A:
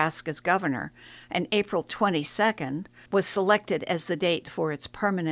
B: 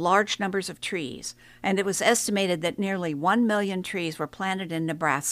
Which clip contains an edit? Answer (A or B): A